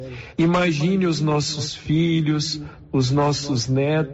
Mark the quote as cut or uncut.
uncut